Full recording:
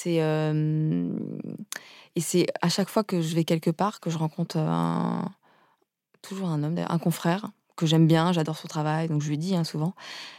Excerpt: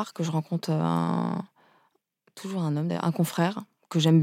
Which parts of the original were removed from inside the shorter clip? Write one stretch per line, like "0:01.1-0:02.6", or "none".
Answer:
none